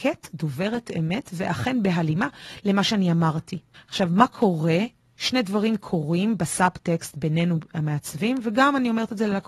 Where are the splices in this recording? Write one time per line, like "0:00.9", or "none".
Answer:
0:03.7